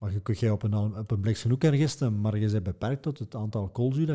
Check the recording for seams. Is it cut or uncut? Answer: uncut